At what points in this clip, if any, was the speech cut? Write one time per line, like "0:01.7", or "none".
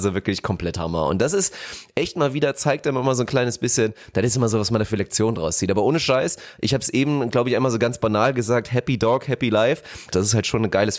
0:10.1

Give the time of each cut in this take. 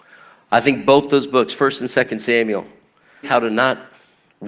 0:03.2

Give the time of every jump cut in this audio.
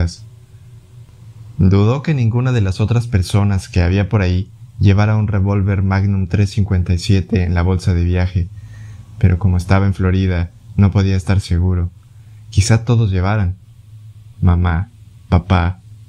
none

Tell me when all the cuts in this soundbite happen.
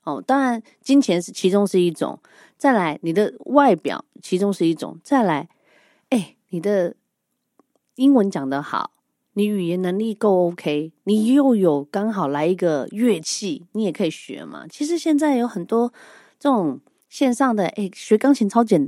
none

